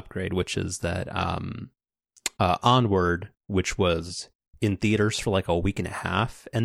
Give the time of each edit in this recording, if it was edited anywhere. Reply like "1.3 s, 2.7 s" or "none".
none

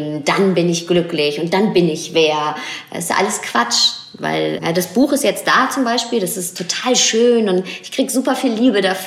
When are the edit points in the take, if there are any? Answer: 4.6 s

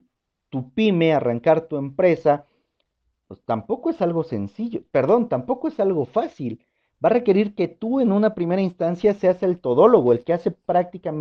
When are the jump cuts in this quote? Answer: none

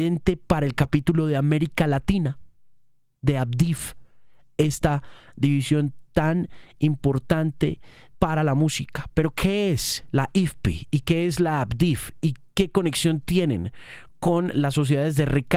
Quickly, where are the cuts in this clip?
8.1 s

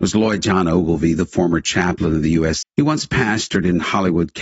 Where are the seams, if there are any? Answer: 2.6 s

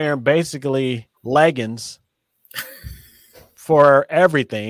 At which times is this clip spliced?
1.2 s

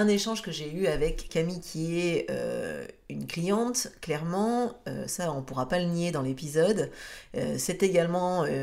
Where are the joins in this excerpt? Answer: 1.3 s

